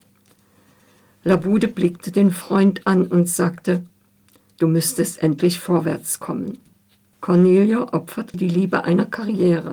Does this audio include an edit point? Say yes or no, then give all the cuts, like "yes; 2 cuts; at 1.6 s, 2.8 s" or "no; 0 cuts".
yes; 2 cuts; at 7.1 s, 8.3 s